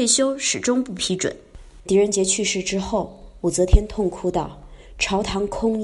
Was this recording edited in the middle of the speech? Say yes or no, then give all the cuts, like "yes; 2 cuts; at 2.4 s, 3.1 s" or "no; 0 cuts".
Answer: yes; 1 cut; at 1.8 s